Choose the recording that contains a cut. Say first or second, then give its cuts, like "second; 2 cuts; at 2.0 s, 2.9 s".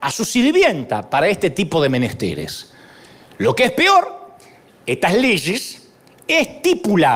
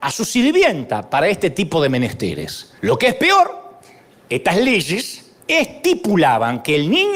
second; 2 cuts; at 2.8 s, 5.4 s